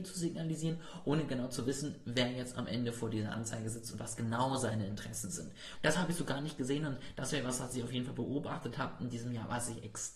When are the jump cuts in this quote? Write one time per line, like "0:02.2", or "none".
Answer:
0:05.7